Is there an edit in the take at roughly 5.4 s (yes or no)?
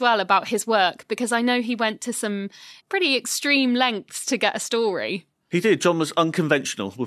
no